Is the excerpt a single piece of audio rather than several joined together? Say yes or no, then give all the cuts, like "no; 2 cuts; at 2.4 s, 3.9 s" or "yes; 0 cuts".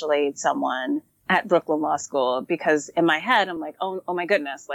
yes; 0 cuts